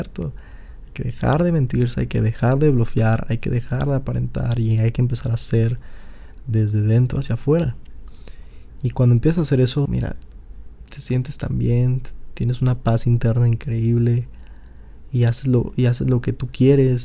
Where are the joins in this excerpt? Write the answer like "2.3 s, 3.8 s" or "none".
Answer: 9.9 s

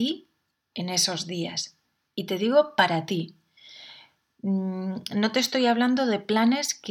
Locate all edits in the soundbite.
none

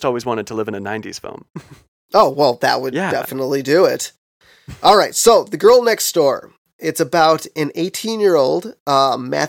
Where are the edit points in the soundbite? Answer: none

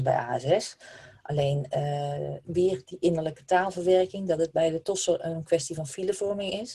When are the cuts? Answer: 2.4 s

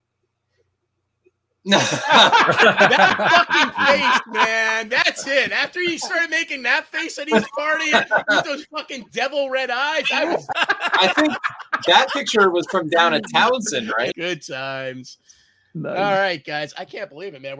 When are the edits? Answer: 10.5 s, 14.1 s

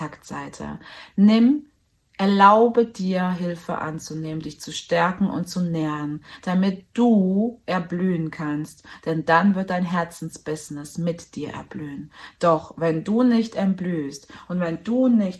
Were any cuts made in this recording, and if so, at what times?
none

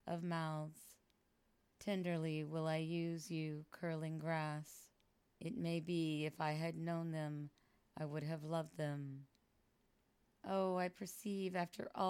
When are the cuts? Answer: 1.7 s, 5.4 s, 10.3 s

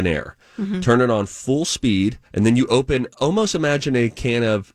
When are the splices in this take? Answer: 2.3 s

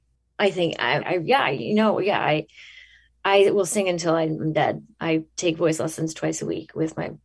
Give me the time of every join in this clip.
1.0 s

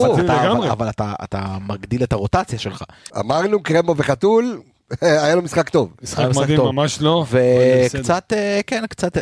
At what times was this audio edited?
3.1 s

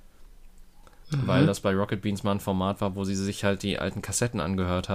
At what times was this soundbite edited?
1.0 s

